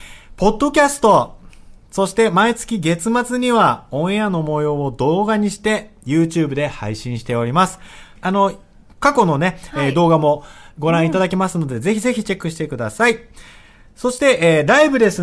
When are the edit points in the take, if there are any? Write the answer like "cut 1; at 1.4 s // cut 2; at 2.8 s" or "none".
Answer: cut 1; at 8.2 s